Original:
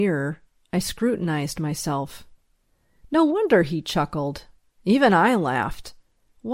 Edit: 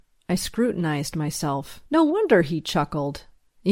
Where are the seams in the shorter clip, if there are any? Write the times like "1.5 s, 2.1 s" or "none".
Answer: 1.9 s